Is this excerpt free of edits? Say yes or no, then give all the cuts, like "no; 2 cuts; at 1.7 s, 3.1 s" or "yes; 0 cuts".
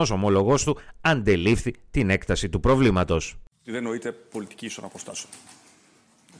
yes; 0 cuts